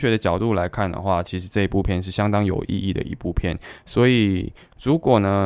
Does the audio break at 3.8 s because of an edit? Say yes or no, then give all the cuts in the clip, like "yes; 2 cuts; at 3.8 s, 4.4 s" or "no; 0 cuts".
no; 0 cuts